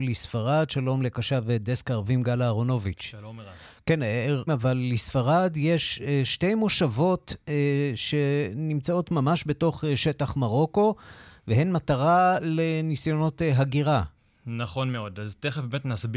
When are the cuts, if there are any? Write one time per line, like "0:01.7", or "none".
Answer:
0:04.5